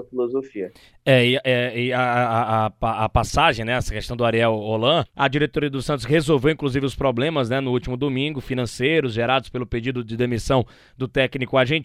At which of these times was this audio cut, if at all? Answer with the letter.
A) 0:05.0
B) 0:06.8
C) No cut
A